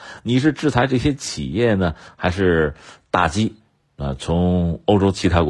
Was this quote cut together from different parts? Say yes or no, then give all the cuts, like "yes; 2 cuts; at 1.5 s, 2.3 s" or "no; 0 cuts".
no; 0 cuts